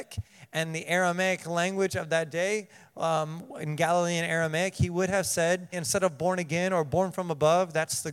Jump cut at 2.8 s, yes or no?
no